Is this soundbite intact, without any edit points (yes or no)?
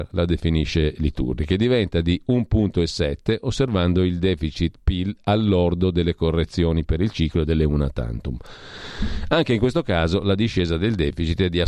yes